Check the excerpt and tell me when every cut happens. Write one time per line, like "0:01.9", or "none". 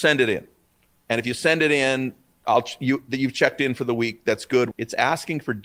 0:04.7